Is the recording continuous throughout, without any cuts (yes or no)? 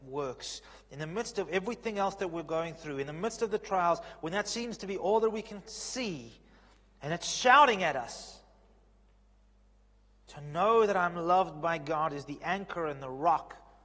yes